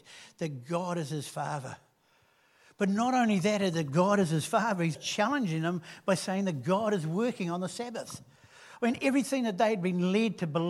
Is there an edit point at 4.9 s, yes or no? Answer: yes